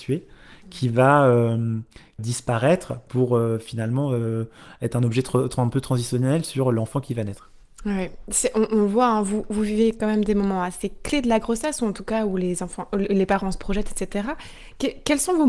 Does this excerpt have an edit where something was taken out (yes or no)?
yes